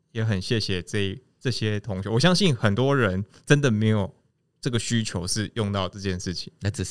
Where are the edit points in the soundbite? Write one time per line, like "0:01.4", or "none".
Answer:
none